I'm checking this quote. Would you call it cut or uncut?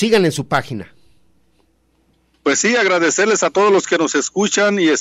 uncut